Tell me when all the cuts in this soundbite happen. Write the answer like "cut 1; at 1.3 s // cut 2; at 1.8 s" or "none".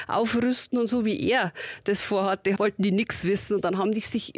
cut 1; at 2.6 s